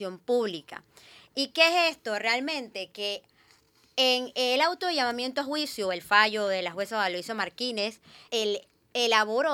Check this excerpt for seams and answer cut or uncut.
cut